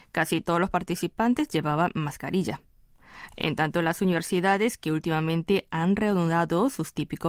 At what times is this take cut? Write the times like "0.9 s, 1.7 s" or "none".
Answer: 3.3 s